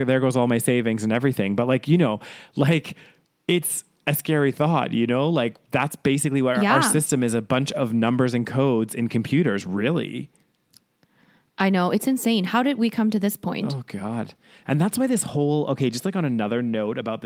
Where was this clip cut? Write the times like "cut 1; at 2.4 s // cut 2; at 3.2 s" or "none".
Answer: none